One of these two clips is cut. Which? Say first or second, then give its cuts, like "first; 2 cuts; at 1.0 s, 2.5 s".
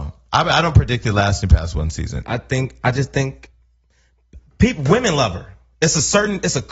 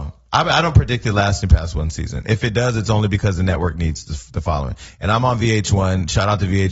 first; 2 cuts; at 2.2 s, 4.5 s